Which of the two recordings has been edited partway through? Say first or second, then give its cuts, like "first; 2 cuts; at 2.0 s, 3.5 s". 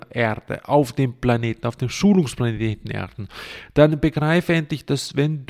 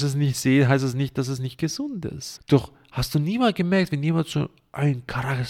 second; 1 cut; at 2.4 s